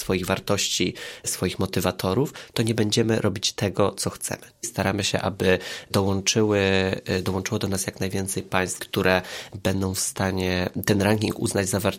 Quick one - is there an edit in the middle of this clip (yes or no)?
yes